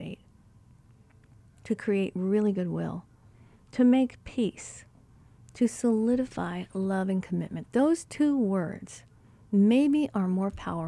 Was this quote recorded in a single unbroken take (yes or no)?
yes